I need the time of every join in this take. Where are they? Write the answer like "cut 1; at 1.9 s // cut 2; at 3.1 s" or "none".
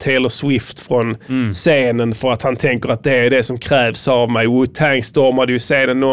none